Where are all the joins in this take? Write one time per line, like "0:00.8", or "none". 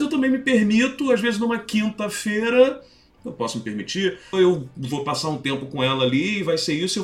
0:03.2
0:04.3